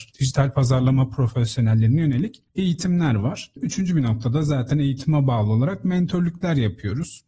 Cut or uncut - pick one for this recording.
uncut